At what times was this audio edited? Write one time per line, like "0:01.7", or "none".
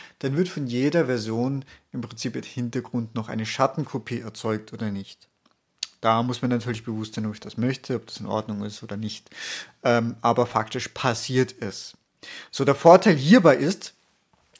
none